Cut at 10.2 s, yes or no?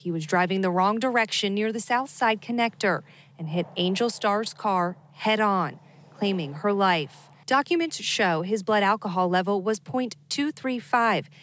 no